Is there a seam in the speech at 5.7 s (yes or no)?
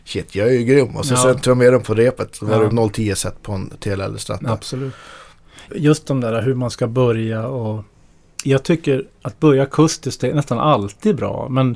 yes